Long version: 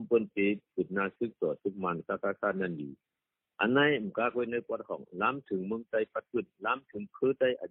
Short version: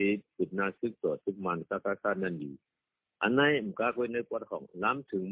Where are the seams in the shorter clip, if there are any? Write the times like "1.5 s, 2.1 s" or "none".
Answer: none